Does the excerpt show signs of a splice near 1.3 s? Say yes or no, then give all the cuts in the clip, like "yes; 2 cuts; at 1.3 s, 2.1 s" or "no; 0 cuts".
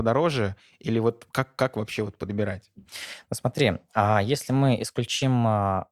no; 0 cuts